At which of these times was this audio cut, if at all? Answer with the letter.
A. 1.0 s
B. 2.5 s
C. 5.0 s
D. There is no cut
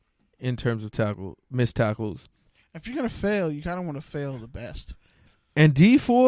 D